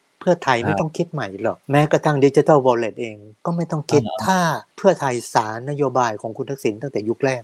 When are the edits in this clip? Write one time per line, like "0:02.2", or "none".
0:01.6
0:04.7